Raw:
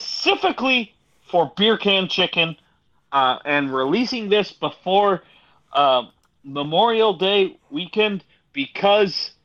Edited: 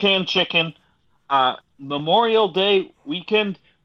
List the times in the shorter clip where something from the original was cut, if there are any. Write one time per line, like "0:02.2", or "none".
0:01.6